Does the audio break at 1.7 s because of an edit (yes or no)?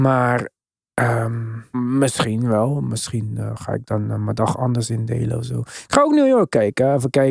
yes